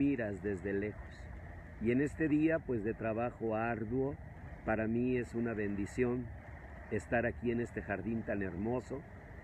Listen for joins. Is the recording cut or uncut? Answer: uncut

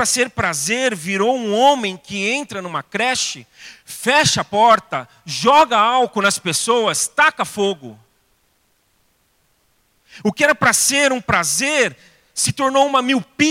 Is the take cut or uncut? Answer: uncut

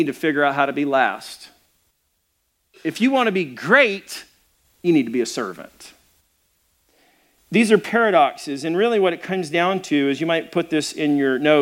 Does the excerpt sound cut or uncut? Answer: uncut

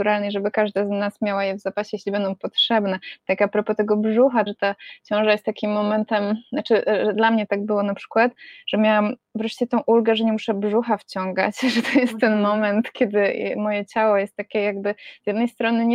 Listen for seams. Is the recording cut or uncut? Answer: cut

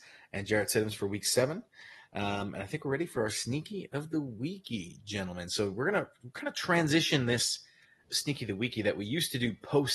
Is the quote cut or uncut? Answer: cut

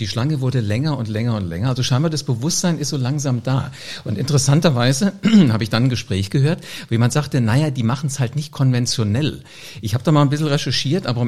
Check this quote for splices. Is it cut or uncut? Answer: uncut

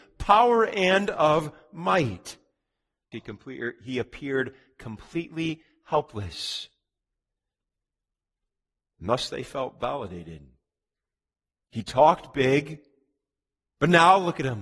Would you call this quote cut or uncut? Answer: cut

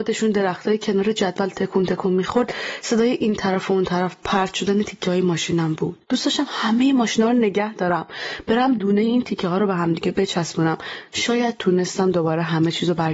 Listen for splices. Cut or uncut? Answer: cut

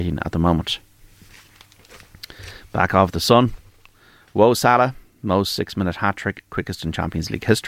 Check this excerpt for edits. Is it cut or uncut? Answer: uncut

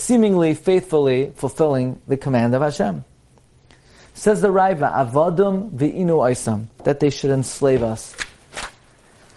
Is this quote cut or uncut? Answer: cut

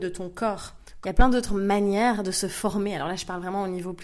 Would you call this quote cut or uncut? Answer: cut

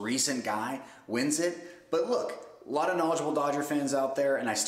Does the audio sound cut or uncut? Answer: uncut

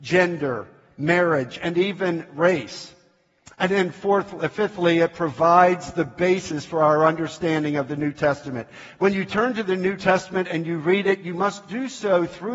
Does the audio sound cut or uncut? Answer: uncut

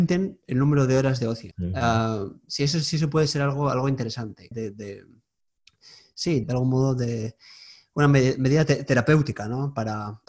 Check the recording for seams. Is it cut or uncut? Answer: cut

